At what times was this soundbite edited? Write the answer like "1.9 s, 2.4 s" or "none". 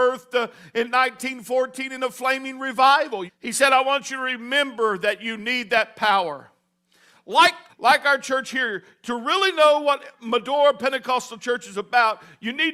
3.3 s, 7.7 s